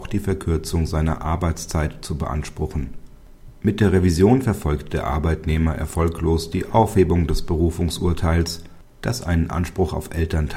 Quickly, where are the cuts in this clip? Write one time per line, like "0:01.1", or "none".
0:03.5